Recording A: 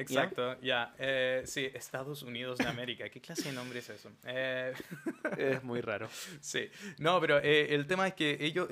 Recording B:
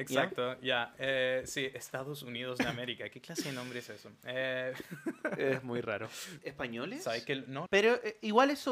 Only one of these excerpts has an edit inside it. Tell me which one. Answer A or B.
B